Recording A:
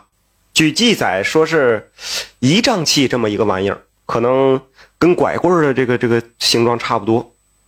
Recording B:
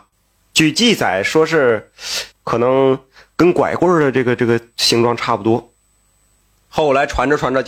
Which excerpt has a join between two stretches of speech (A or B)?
B